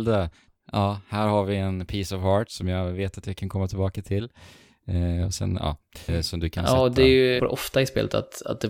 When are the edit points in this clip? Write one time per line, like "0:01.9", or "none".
0:06.1
0:07.4

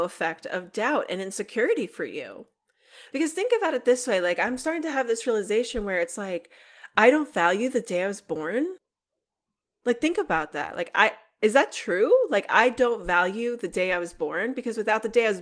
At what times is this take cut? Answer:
none

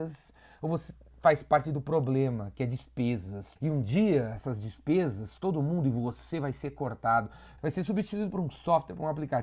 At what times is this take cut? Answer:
0:03.6
0:07.6

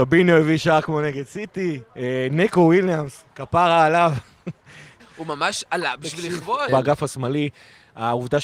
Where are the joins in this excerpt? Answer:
0:01.9
0:05.0
0:06.7

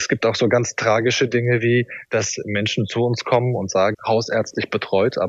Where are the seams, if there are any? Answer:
0:03.9

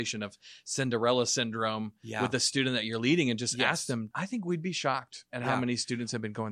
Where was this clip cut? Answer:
0:04.1

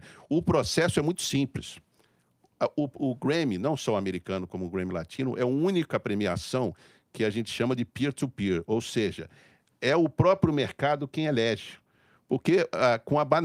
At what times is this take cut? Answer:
none

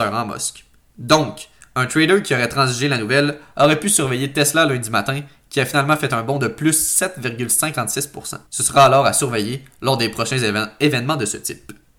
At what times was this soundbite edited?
0:08.5

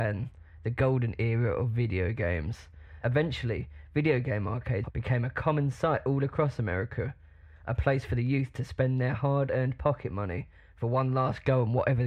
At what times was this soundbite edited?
0:03.0

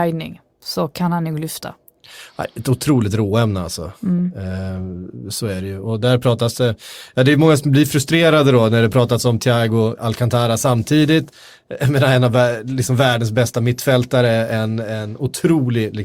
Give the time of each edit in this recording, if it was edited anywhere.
0:10.0

